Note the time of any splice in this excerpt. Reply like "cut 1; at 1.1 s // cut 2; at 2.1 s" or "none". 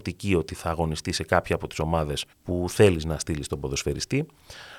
cut 1; at 2.3 s